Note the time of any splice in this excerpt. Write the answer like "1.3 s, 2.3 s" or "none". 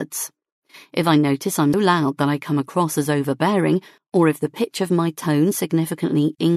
1.7 s, 4.0 s